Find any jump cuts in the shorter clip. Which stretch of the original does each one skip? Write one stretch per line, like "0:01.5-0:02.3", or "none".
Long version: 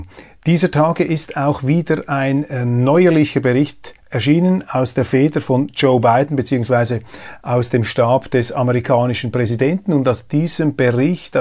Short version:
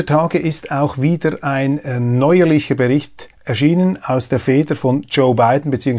none